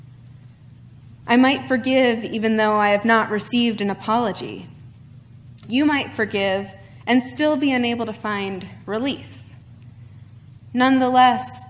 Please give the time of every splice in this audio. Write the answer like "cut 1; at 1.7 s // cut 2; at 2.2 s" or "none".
none